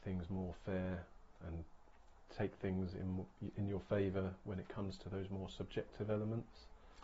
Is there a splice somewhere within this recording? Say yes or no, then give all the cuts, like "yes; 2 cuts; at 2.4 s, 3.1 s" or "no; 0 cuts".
yes; 1 cut; at 1.4 s